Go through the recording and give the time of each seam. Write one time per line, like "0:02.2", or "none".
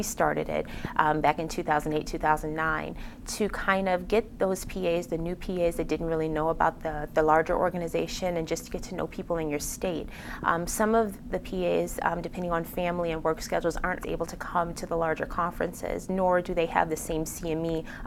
0:14.0